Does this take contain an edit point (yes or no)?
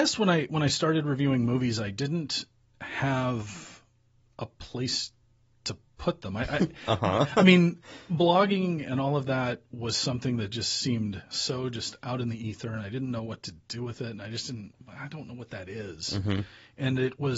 no